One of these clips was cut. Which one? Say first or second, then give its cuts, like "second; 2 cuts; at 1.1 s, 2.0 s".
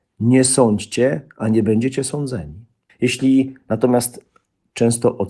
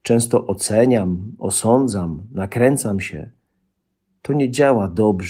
first; 1 cut; at 2.9 s